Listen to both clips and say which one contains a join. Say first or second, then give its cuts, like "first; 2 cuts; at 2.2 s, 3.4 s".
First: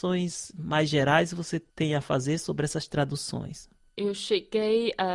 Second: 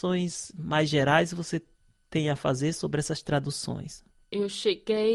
first; 1 cut; at 1.7 s